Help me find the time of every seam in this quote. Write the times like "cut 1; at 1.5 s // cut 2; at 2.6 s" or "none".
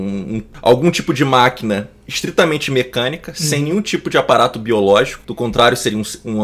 none

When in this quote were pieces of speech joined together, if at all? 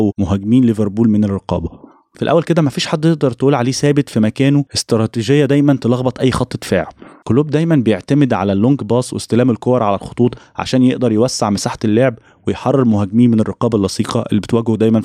none

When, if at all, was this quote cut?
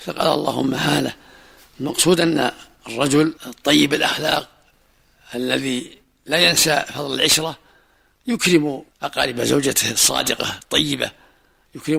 cut 1; at 3.4 s // cut 2; at 8.9 s

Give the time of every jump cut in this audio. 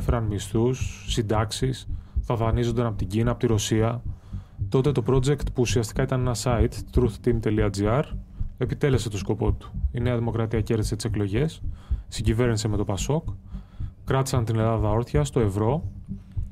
cut 1; at 4.7 s

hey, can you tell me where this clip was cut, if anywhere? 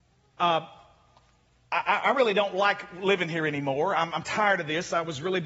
none

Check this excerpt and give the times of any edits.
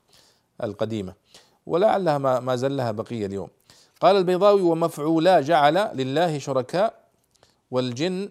none

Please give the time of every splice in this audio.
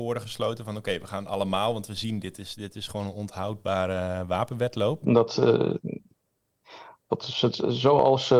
cut 1; at 5.0 s

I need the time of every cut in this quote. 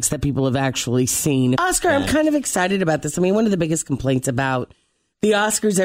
cut 1; at 1.5 s

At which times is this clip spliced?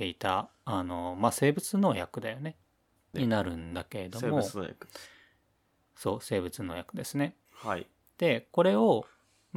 cut 1; at 3.1 s // cut 2; at 7.5 s

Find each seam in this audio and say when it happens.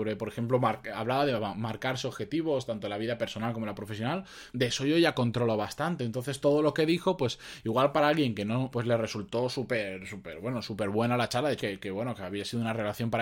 cut 1; at 4.5 s // cut 2; at 8.7 s // cut 3; at 11.6 s

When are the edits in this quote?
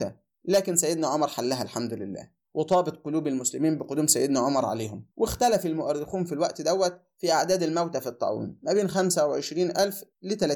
cut 1; at 5.1 s

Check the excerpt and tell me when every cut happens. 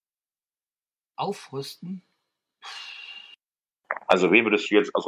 none

